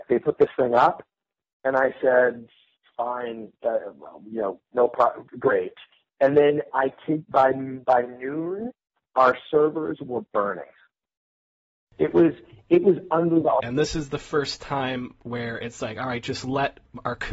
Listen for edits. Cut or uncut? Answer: cut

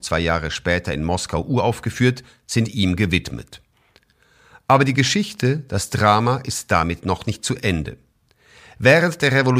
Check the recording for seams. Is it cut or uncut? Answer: uncut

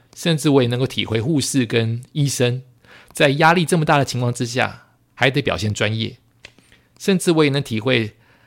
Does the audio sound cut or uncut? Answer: uncut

